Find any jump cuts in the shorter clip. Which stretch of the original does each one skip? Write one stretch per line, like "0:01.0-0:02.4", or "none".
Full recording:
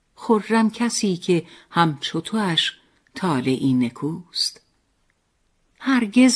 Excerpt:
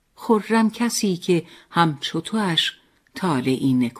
none